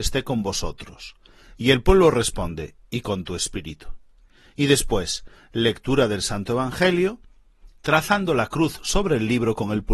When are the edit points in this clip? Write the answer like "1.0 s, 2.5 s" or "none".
none

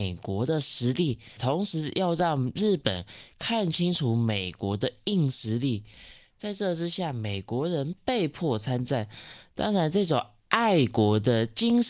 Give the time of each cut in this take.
none

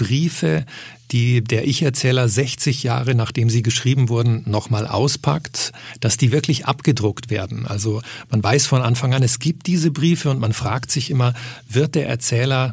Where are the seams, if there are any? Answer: none

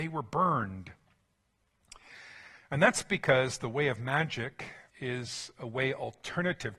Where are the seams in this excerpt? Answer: 4.9 s

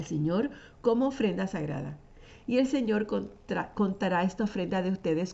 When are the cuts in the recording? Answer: none

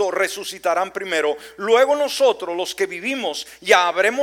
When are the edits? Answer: none

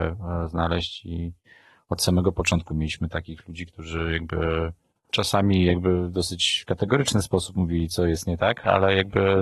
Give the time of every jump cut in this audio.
none

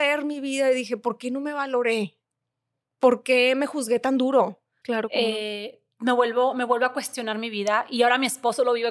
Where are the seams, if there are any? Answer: 4.8 s

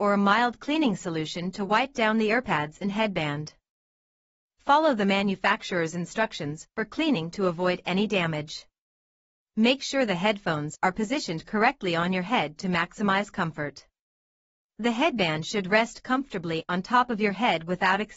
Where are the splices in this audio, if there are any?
none

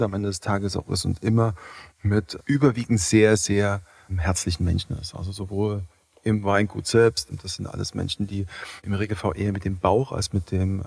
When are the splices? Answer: none

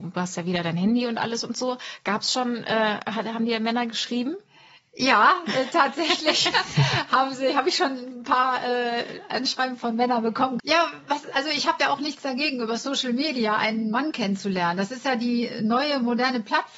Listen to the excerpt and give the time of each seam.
10.6 s

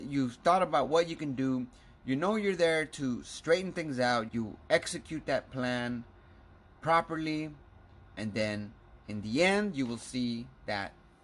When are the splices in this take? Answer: 4.3 s

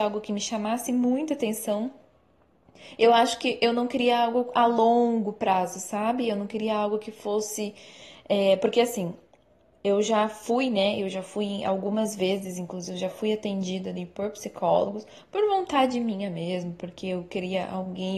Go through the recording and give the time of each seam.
none

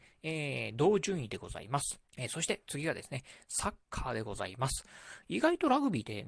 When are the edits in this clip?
2.1 s, 5.2 s

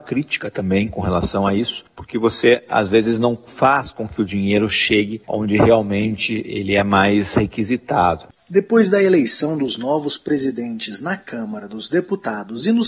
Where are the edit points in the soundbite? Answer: none

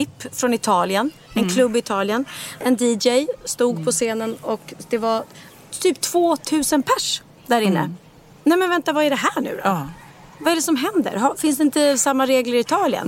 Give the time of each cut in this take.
2.6 s

